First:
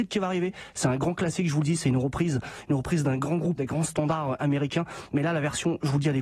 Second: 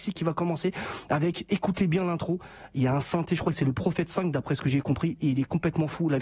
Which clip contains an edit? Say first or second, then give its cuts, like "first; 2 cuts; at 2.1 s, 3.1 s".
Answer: first; 1 cut; at 3.6 s